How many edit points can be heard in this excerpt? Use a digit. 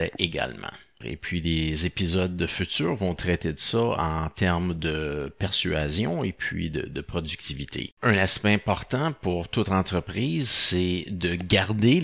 2